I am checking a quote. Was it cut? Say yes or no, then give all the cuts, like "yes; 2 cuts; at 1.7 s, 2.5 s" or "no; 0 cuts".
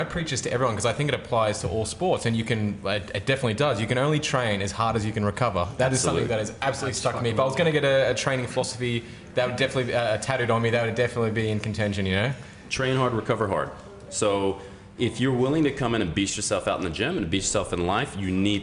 no; 0 cuts